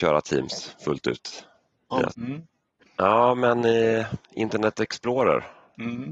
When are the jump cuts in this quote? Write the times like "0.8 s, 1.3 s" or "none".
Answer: 2.1 s